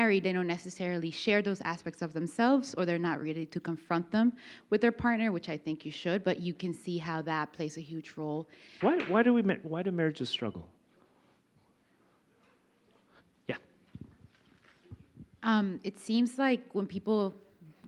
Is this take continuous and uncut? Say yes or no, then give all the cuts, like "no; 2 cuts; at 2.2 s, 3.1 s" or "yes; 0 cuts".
no; 1 cut; at 8.8 s